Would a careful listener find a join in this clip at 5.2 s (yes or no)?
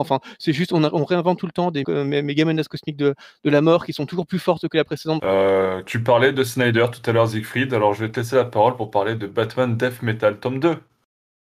yes